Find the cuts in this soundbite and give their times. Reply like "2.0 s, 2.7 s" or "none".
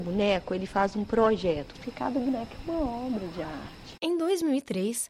1.7 s, 4.0 s